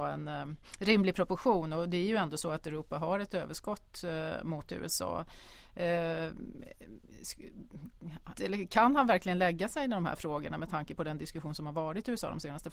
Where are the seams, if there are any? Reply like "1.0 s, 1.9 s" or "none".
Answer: 8.3 s

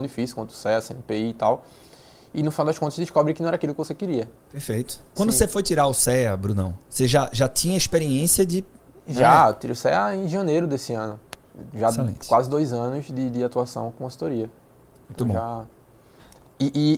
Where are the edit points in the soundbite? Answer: 5.2 s

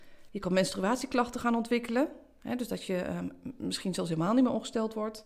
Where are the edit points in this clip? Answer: none

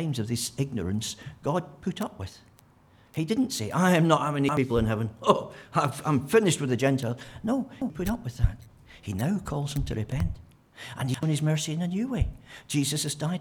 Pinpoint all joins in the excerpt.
none

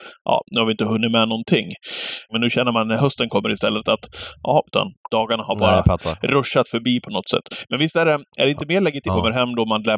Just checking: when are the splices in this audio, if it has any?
2.3 s, 4.7 s, 9.1 s

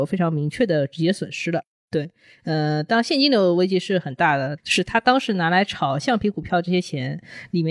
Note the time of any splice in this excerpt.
1.8 s, 4.6 s

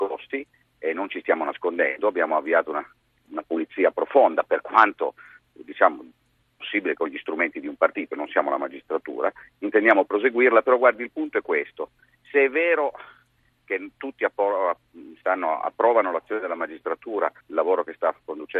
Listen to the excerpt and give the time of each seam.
3.2 s, 17.4 s

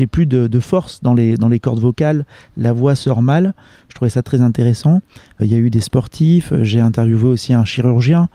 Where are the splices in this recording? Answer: 5.4 s

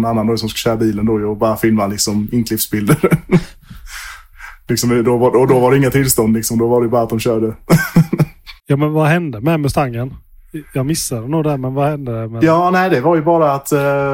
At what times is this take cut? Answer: 8.6 s

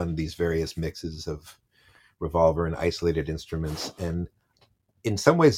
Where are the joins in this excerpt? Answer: none

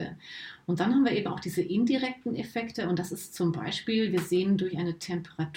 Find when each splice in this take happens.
none

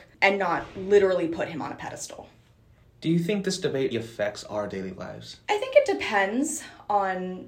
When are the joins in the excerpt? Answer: 3.9 s, 5.4 s

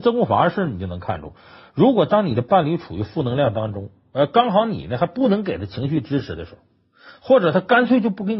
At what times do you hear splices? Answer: none

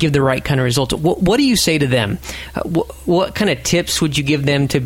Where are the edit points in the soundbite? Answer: none

